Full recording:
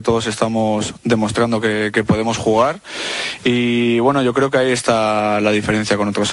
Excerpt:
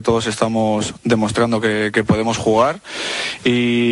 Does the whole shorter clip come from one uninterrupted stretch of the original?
yes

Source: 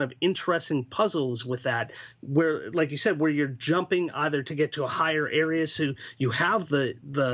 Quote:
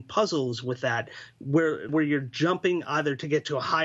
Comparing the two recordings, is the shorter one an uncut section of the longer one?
no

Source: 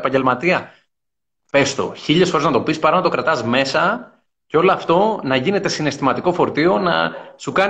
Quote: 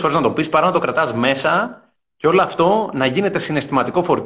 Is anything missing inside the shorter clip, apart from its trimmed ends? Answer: no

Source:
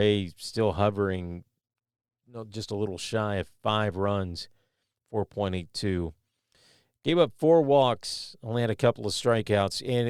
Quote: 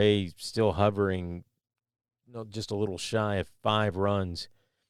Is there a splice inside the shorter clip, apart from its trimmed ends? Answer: no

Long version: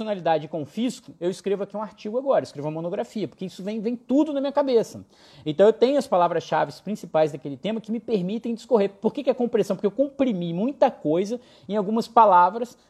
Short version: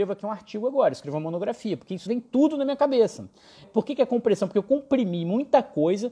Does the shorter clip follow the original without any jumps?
no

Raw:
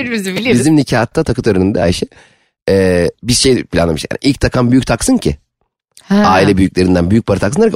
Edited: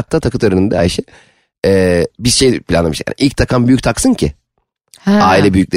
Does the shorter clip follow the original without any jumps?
yes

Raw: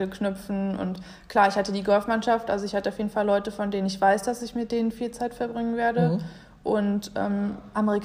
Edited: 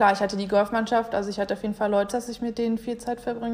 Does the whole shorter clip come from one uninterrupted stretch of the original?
no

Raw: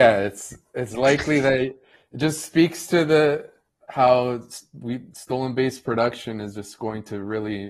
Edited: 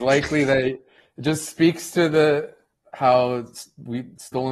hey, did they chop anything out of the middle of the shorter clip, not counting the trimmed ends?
no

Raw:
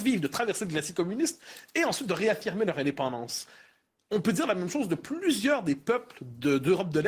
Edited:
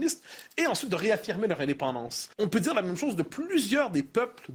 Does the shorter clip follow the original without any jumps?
no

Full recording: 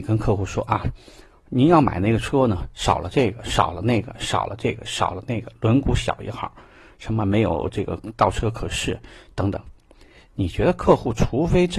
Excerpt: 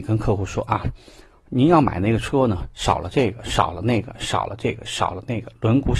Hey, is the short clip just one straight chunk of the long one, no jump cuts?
yes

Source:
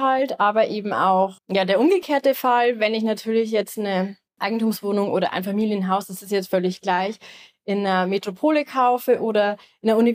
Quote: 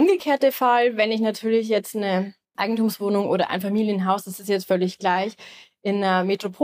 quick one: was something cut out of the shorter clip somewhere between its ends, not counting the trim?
no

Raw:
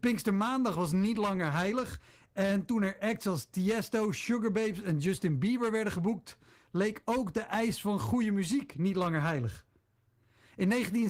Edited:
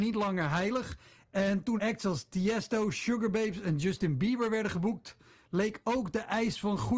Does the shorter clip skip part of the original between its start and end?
yes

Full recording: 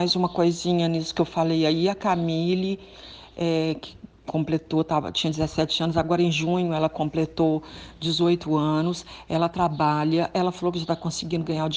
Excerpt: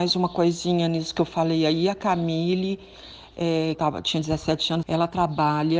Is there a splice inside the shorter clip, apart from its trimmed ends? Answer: yes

